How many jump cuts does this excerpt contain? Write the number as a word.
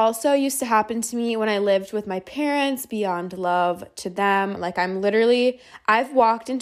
one